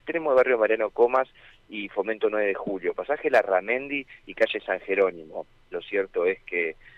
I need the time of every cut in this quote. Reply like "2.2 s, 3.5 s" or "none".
5.7 s